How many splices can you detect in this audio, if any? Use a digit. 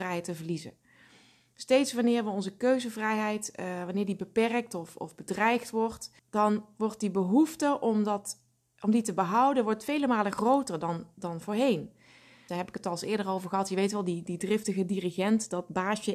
2